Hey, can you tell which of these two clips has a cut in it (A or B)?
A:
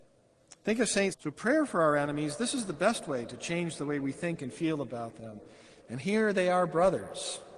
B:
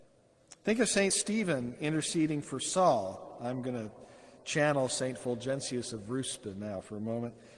A